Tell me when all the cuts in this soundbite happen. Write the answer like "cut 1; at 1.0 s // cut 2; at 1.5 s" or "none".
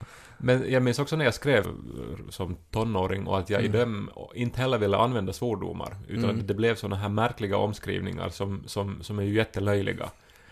cut 1; at 1.6 s